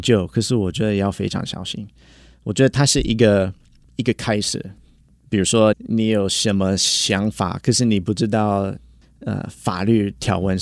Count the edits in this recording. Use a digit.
1